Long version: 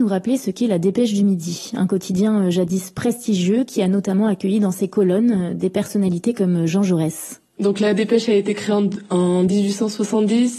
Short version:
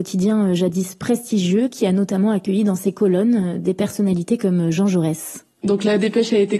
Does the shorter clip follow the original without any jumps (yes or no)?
yes